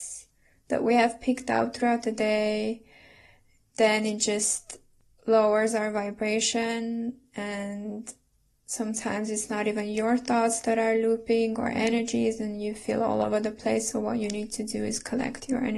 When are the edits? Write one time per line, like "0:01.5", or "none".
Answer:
none